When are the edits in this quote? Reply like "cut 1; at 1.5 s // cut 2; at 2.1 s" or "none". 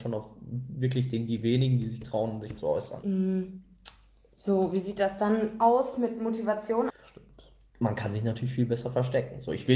cut 1; at 3.0 s // cut 2; at 6.9 s